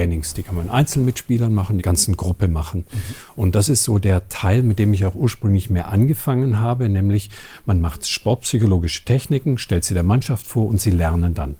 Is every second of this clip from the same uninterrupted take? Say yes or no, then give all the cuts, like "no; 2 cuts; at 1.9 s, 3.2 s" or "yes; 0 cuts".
no; 1 cut; at 1.8 s